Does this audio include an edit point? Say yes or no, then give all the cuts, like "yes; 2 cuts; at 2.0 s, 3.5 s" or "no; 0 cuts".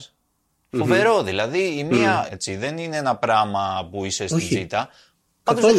yes; 1 cut; at 2.3 s